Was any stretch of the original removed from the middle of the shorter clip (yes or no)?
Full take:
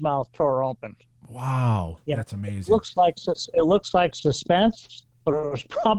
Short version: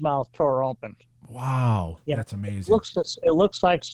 yes